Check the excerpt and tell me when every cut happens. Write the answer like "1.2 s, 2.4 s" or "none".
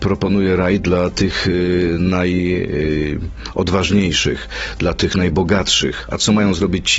none